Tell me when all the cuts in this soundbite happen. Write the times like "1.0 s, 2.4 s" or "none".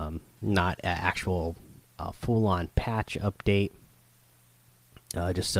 none